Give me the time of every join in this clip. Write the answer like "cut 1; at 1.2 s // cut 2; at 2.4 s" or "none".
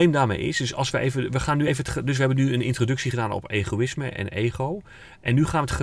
none